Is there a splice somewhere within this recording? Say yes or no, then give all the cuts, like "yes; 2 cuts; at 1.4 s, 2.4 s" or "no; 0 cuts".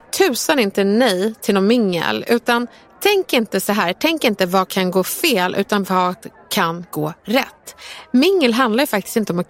no; 0 cuts